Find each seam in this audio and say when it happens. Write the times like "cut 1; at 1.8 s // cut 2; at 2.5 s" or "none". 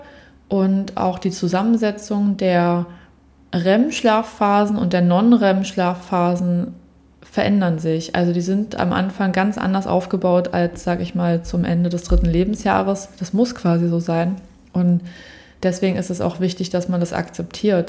none